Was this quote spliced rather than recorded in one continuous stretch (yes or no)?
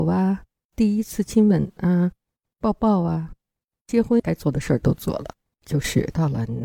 no